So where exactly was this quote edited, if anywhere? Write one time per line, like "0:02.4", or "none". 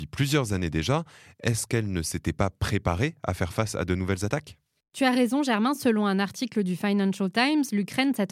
none